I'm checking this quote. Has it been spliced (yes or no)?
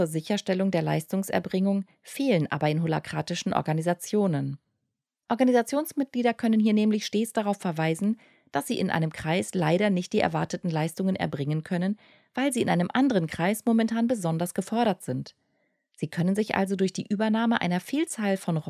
no